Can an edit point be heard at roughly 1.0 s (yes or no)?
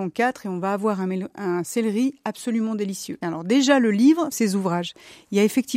no